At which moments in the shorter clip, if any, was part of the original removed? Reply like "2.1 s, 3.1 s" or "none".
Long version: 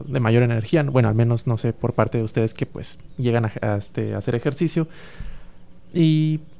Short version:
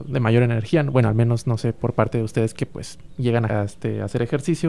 3.5 s